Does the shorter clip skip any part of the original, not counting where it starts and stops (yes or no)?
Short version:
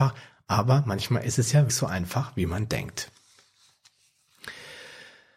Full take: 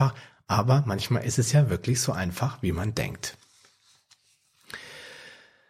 yes